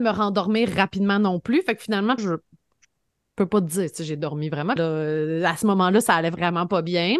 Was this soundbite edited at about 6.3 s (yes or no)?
no